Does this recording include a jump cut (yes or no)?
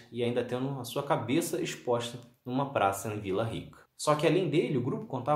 no